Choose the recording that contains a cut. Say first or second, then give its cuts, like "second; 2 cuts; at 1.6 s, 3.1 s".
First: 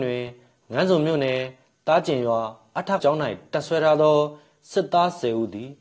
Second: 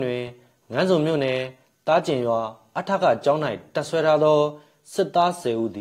first; 1 cut; at 3.0 s